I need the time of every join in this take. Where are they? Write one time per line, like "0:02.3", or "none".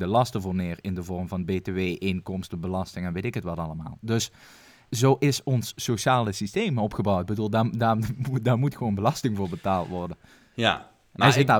none